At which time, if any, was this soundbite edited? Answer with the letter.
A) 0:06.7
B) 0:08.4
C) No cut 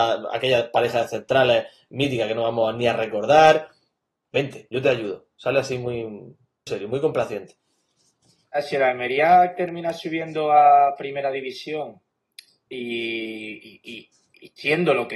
A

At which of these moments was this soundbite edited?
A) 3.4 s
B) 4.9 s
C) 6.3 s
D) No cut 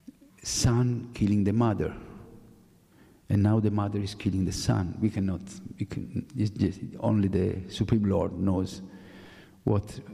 C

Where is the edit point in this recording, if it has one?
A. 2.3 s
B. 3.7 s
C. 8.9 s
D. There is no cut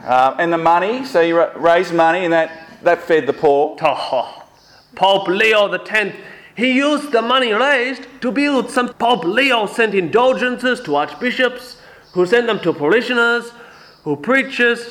C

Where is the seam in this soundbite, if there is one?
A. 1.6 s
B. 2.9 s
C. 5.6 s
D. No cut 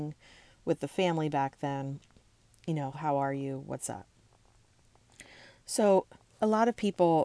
B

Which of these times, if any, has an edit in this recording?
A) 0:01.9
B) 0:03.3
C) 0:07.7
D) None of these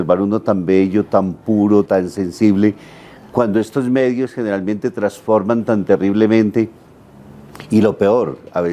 A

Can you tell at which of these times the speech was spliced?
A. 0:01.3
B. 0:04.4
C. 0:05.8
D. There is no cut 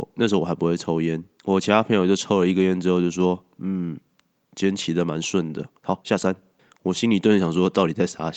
C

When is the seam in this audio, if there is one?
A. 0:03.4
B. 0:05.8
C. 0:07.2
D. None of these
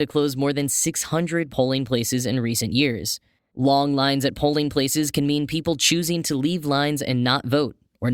A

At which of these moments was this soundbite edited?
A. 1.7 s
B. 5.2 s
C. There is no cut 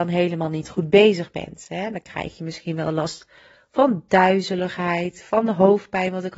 C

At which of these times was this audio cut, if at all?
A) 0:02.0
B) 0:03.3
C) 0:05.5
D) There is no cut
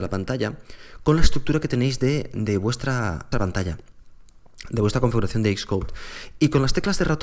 B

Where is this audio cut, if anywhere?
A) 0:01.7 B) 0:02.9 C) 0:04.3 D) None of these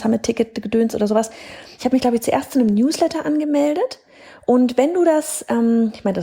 A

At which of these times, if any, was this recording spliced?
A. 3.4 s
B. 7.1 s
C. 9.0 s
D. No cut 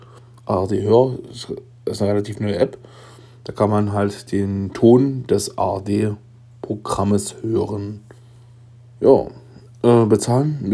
C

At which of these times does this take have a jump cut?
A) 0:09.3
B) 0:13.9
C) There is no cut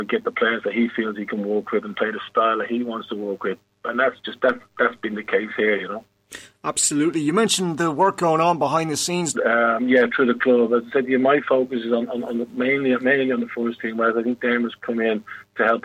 A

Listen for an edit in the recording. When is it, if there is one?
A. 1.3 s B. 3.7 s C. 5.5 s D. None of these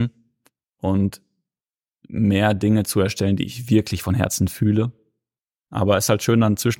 C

